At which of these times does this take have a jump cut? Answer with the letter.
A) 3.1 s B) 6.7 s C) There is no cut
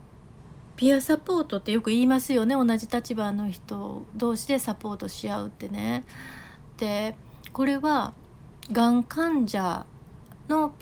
C